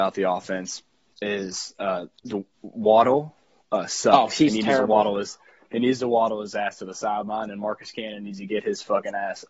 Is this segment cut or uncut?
uncut